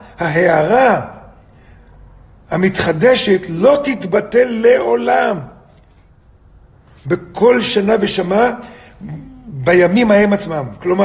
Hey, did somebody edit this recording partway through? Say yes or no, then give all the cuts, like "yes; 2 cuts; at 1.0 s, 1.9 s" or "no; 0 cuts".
no; 0 cuts